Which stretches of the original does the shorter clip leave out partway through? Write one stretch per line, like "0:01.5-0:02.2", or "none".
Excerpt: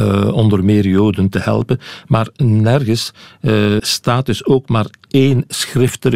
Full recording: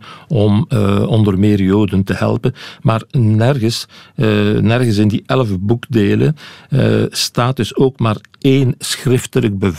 0:04.5-0:07.1